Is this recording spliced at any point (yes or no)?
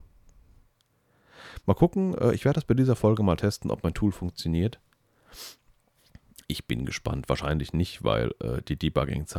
no